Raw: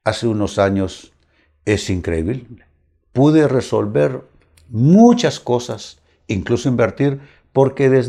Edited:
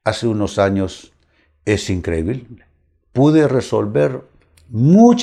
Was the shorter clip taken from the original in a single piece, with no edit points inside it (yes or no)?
yes